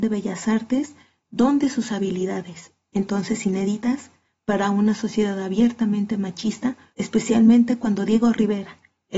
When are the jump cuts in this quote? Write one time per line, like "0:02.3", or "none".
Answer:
0:06.9